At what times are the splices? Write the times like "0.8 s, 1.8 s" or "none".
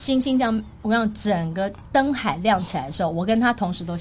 none